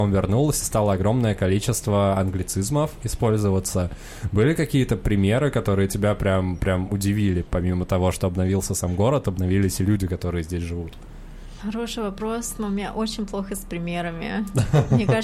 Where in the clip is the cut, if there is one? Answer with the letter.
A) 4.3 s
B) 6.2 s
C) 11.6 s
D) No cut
C